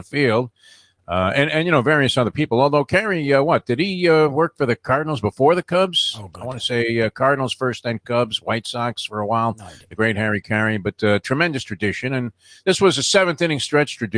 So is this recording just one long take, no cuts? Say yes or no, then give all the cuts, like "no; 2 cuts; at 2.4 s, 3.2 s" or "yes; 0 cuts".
no; 1 cut; at 1.0 s